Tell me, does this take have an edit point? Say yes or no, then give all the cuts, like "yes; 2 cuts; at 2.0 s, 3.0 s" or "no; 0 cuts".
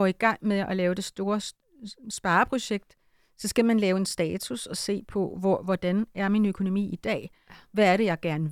no; 0 cuts